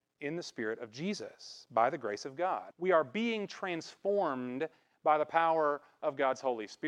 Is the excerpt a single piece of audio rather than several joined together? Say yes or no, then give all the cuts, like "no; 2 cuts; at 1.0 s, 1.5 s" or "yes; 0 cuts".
no; 1 cut; at 2.7 s